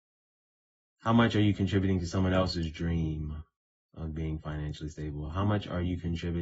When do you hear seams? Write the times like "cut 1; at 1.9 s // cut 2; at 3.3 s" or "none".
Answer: none